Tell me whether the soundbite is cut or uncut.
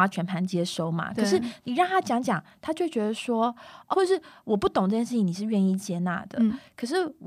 cut